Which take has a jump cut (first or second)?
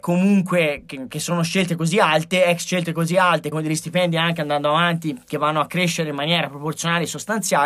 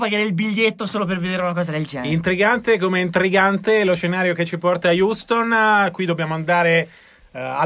first